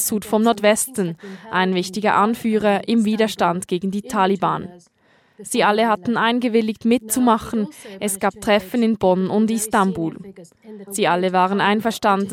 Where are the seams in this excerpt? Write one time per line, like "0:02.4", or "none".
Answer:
0:10.9